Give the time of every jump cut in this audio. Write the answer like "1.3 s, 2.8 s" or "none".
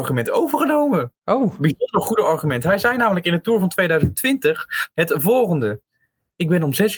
4.9 s